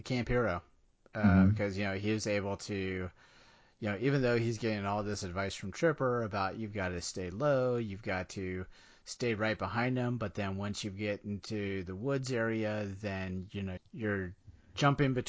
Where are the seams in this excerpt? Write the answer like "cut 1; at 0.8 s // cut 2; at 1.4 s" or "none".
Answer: cut 1; at 13.8 s